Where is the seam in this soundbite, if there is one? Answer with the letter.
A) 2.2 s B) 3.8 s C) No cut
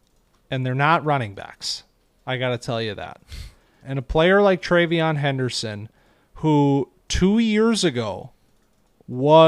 B